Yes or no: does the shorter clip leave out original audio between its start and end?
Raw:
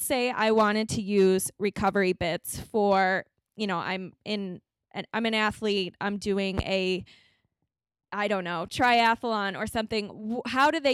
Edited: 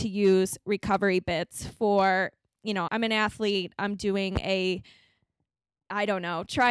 yes